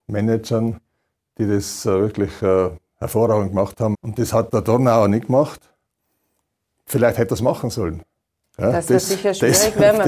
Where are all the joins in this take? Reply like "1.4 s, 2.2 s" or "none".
3.9 s, 8.4 s